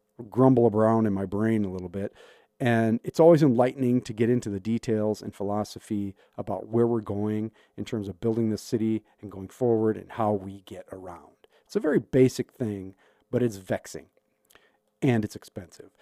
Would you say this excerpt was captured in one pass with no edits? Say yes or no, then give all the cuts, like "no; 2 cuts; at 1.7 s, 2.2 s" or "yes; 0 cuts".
yes; 0 cuts